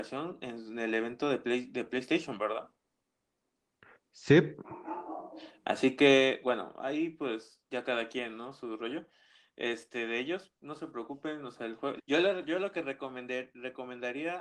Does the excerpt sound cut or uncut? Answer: cut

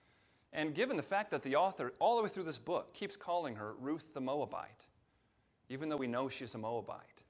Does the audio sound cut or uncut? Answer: uncut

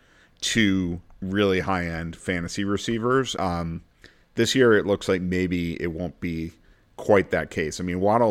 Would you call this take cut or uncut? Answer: cut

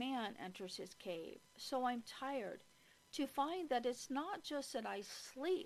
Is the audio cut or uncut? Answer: uncut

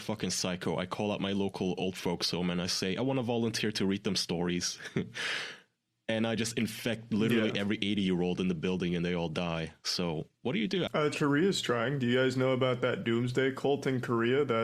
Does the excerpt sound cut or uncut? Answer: cut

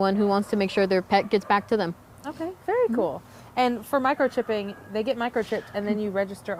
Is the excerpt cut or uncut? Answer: uncut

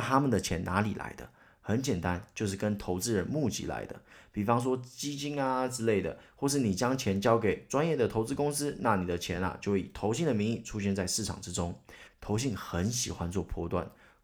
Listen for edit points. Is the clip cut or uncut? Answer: cut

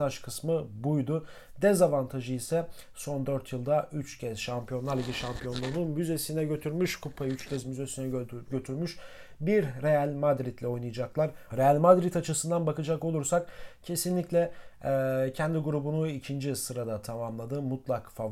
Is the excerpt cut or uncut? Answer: cut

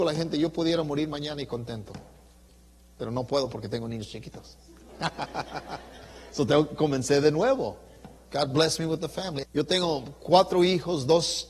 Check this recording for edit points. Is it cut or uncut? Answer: cut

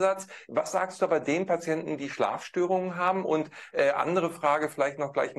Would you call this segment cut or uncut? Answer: uncut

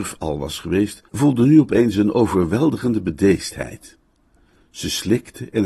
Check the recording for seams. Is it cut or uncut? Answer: uncut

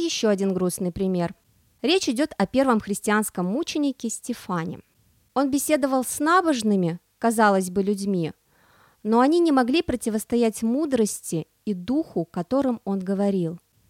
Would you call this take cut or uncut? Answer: uncut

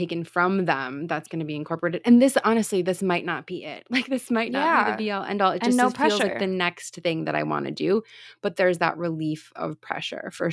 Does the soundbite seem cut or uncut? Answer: uncut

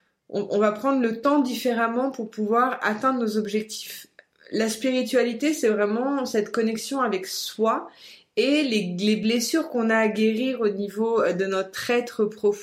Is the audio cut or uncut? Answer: uncut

